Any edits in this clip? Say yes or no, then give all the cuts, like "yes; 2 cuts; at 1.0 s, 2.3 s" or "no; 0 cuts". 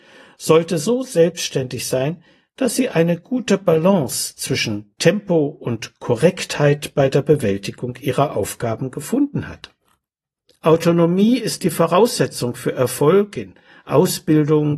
yes; 1 cut; at 10.5 s